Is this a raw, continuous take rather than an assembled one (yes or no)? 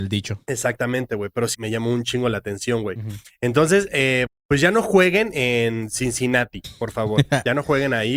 no